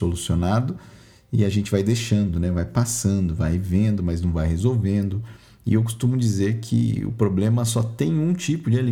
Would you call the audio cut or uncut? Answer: uncut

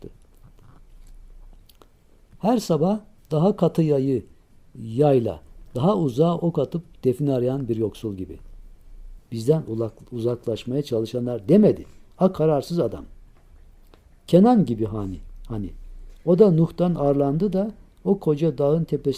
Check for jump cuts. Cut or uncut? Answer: cut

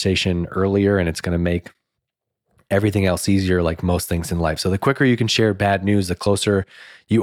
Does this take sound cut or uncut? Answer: uncut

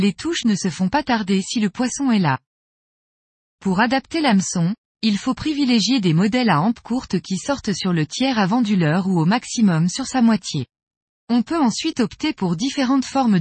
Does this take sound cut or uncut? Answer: cut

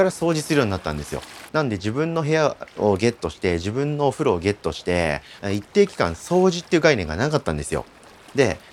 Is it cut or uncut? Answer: cut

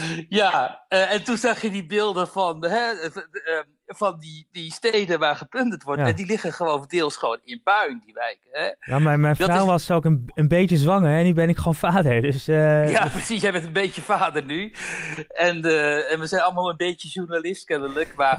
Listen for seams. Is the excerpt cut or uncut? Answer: uncut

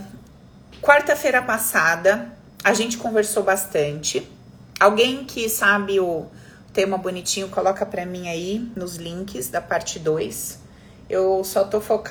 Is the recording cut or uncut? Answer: uncut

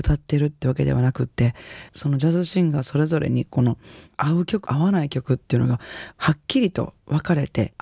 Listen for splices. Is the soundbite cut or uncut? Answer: cut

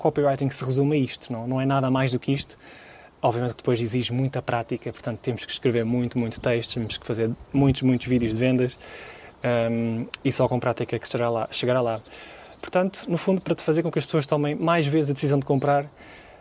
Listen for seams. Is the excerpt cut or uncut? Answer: uncut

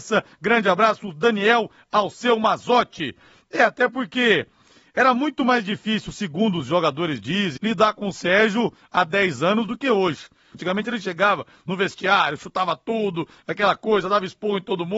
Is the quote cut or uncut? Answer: cut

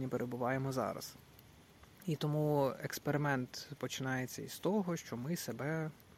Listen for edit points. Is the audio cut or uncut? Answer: uncut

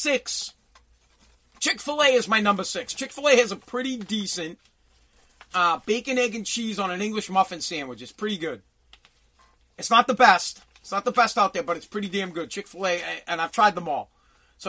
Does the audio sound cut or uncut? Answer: uncut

